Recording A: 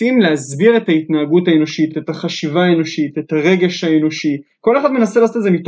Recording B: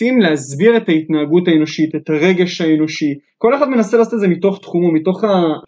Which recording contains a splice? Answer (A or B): B